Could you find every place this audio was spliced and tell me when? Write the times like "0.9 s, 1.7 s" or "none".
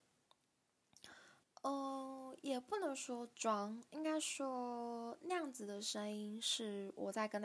1.4 s